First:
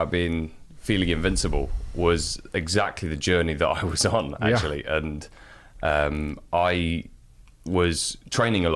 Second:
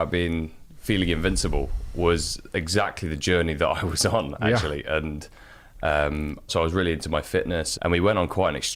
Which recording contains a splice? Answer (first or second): second